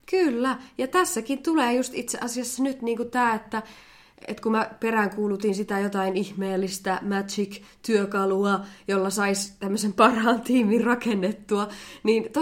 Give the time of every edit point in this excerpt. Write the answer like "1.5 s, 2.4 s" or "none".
none